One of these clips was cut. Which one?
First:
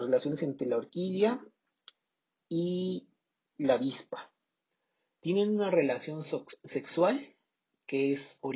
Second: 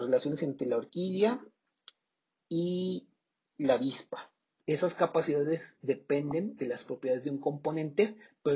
second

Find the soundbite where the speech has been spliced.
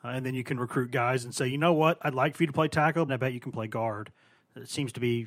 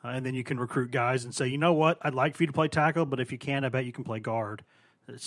first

